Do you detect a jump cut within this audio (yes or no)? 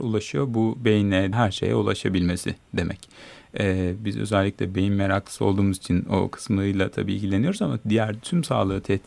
yes